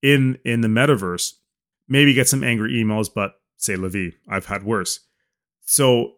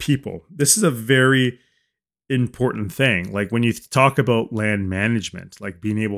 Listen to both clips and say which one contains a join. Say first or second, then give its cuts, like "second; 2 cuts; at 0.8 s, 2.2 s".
first; 1 cut; at 1.7 s